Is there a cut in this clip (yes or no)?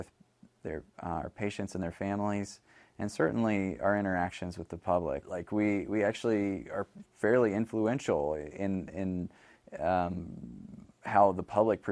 yes